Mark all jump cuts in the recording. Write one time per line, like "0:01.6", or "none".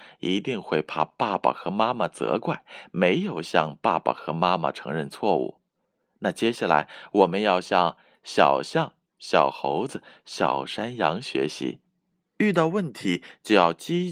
none